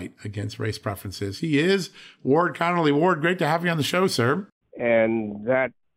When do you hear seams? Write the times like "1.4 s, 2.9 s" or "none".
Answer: 4.6 s